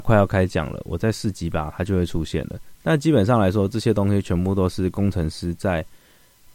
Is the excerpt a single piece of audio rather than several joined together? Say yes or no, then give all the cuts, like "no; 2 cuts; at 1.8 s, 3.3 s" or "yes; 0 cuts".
no; 1 cut; at 2.7 s